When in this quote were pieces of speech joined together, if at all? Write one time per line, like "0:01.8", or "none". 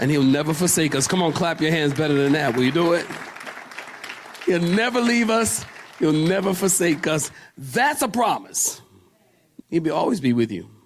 0:09.6